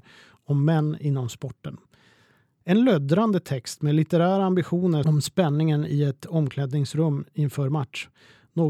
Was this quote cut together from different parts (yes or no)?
no